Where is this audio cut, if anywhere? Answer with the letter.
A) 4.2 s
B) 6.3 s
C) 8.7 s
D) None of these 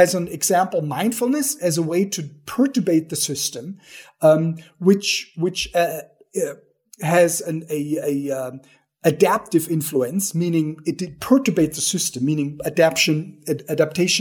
D